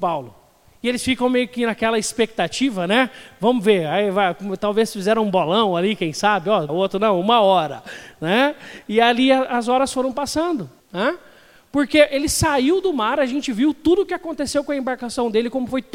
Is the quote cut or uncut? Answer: cut